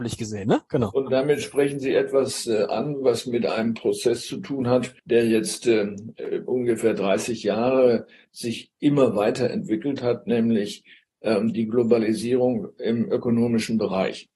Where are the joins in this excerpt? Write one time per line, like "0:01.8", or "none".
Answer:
0:05.0
0:08.2